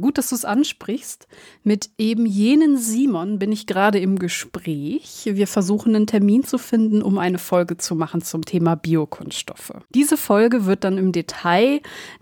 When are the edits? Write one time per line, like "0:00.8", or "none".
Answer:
0:09.8